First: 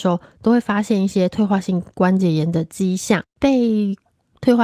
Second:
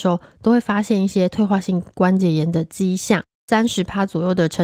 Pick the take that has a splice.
first; 1 cut; at 3.3 s

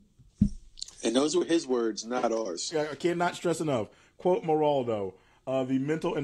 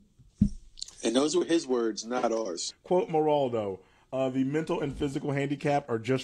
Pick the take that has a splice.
second; 1 cut; at 2.7 s

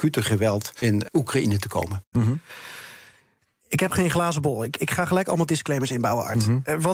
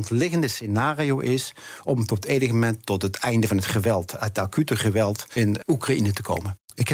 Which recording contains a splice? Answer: first; 1 cut; at 2.1 s

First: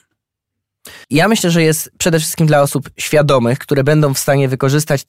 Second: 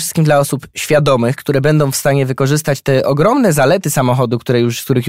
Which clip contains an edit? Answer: first; 1 cut; at 1.0 s

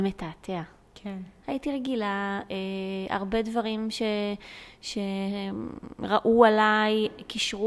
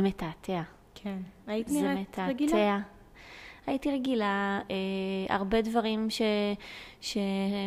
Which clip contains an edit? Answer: first; 1 cut; at 1.4 s

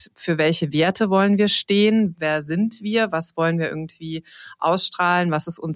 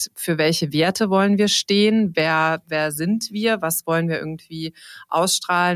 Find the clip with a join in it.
first; 1 cut; at 2.1 s

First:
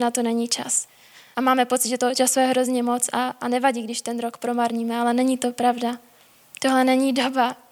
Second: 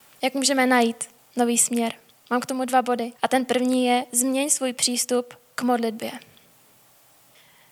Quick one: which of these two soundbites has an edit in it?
second; 1 cut; at 3.2 s

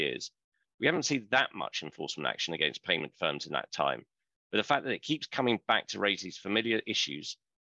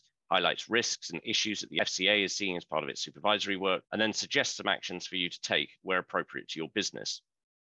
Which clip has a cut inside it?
second; 1 cut; at 3.9 s

